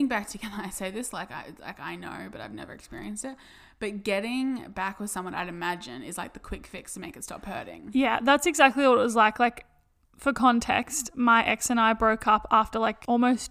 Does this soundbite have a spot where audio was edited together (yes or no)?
no